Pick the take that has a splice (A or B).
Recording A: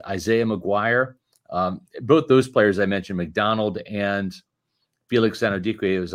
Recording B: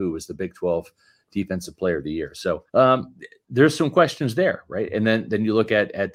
B